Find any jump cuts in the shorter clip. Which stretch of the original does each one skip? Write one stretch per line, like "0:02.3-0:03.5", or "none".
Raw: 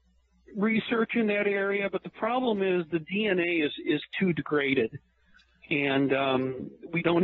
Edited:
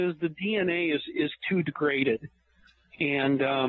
none